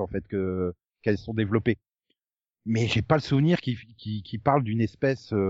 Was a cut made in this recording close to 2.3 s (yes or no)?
no